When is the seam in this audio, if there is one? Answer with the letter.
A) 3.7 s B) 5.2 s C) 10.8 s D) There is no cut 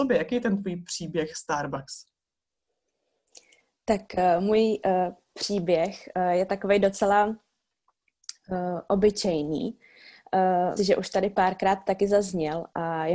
C